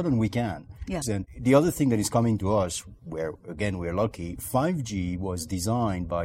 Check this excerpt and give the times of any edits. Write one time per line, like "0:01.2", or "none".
0:01.0